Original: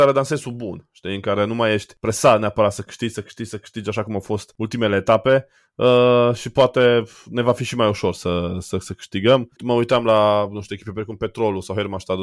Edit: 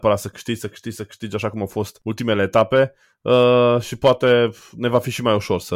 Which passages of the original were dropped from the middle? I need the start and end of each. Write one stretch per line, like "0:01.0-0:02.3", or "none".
none